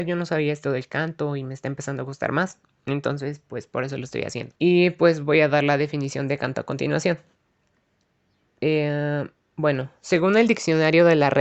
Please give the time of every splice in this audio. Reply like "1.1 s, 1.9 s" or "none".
4.6 s